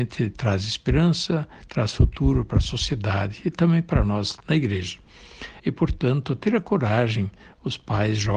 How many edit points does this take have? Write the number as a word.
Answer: one